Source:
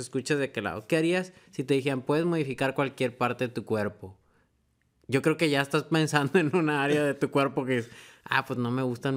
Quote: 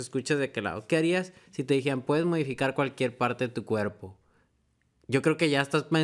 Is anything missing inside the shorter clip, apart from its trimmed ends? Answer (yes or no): no